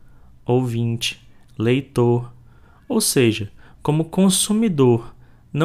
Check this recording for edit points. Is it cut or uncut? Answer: uncut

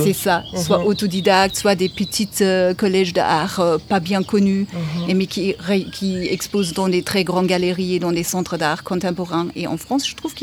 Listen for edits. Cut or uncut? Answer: uncut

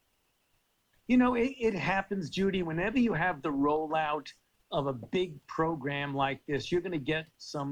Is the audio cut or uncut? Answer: uncut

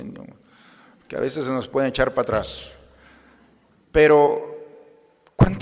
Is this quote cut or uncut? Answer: uncut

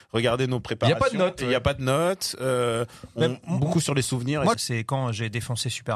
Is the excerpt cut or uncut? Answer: cut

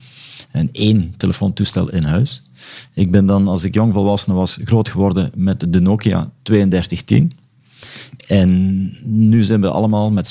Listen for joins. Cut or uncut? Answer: uncut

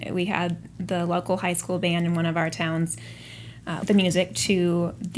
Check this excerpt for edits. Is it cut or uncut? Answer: cut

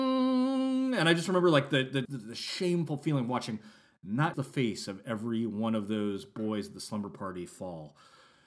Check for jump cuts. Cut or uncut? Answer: cut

